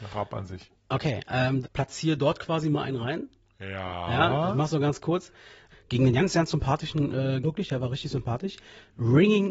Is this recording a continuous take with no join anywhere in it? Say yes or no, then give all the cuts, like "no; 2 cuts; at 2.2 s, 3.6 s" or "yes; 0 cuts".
no; 3 cuts; at 1.6 s, 5.7 s, 7.4 s